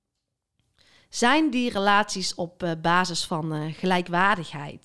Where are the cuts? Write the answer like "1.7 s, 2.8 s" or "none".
none